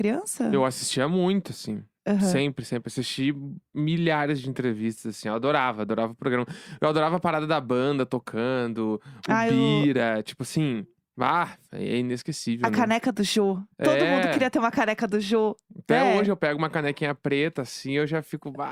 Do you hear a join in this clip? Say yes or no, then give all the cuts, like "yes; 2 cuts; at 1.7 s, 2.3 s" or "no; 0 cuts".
yes; 1 cut; at 11.1 s